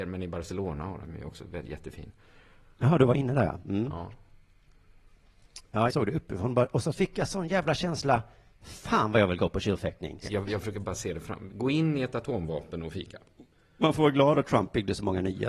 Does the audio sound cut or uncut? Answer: cut